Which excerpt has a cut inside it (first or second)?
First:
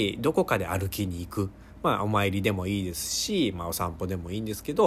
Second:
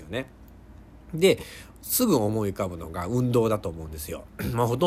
second